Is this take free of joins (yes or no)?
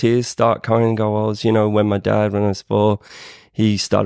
yes